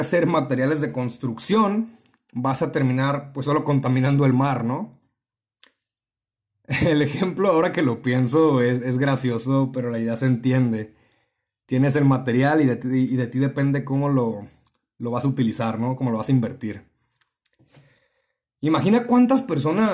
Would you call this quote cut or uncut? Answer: uncut